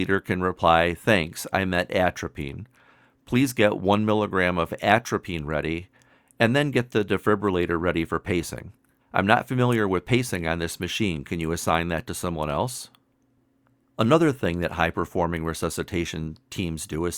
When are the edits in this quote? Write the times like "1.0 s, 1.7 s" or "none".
9.0 s